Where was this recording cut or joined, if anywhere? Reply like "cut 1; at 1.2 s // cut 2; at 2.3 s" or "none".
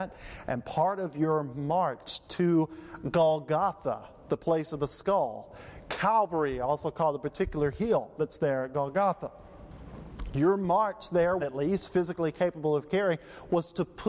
cut 1; at 11.4 s